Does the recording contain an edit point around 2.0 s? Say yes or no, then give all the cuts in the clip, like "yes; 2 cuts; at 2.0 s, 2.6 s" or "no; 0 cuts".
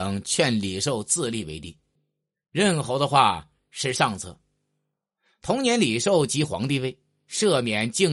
yes; 1 cut; at 2.0 s